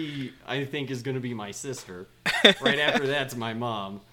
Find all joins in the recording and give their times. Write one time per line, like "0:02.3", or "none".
none